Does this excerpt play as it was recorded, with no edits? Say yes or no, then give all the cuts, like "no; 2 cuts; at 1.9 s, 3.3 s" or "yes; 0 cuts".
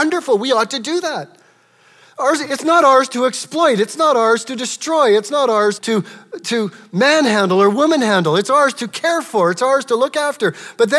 no; 1 cut; at 5.8 s